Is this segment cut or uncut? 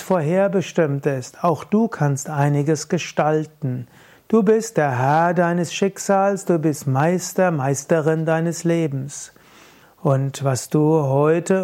cut